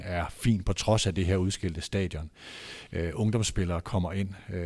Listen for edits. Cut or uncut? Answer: uncut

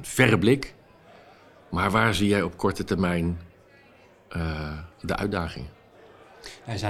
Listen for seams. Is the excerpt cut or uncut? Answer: cut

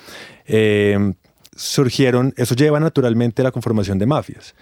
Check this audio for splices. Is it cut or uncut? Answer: cut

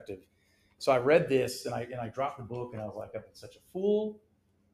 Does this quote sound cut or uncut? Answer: uncut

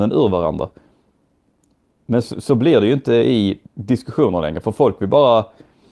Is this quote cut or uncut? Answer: cut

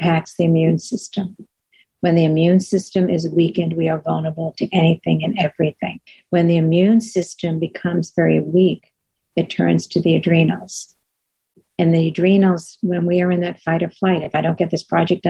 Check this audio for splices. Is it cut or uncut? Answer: uncut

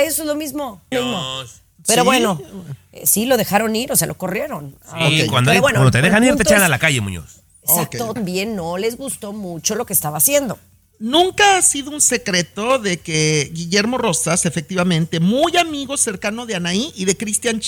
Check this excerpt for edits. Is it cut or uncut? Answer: cut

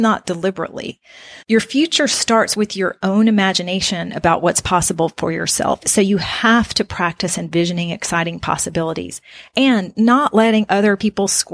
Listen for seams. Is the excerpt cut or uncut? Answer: cut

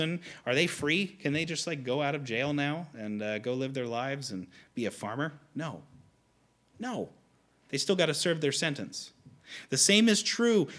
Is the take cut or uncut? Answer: uncut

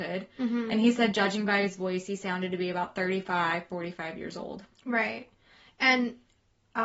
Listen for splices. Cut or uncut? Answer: uncut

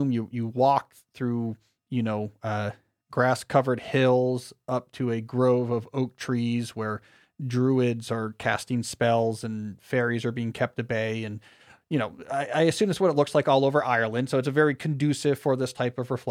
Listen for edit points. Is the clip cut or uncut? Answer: uncut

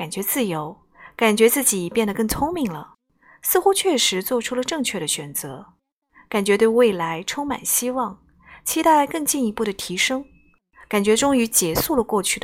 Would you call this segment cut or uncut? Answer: uncut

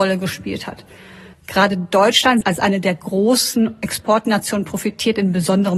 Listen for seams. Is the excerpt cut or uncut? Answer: cut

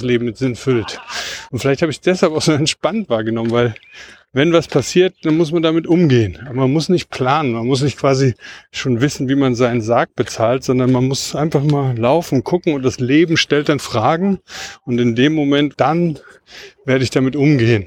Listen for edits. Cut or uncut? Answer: cut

